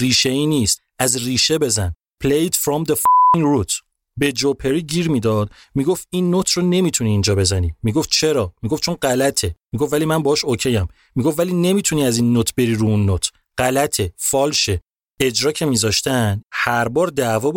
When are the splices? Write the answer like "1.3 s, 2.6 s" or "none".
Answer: none